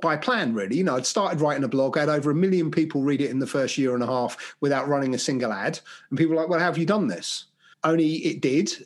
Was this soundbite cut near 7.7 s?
yes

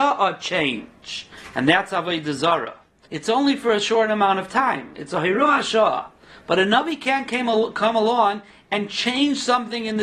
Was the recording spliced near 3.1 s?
yes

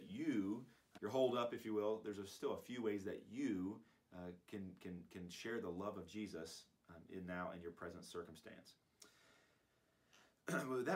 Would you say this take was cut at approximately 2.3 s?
no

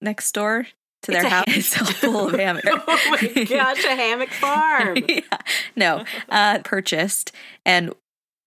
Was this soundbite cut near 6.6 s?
yes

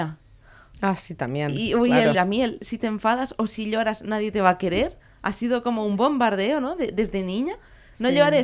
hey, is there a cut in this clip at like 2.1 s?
yes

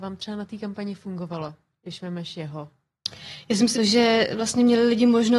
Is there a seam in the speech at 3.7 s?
yes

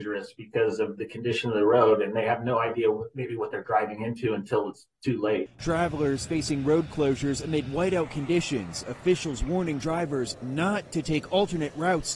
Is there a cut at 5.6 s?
yes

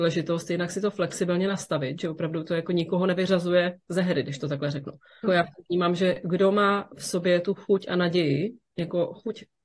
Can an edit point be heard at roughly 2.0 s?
no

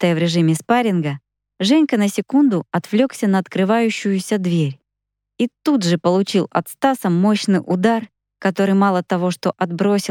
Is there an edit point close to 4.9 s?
no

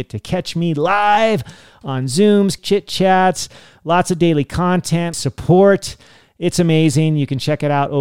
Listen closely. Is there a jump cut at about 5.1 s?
yes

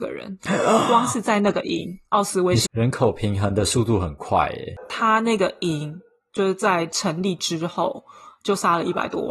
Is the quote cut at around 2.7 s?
yes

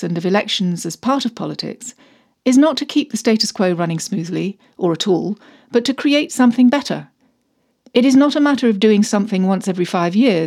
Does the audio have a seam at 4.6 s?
no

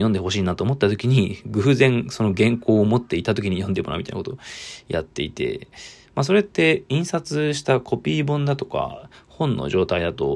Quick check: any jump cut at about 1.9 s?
no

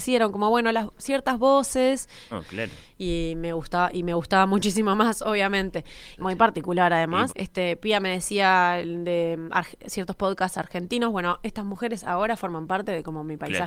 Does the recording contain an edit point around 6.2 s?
yes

